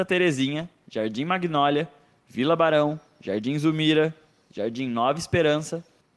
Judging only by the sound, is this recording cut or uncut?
uncut